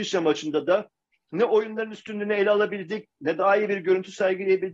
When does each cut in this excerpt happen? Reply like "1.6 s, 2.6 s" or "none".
none